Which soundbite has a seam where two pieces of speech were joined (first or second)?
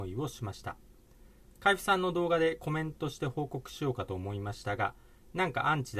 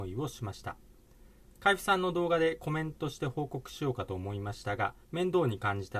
second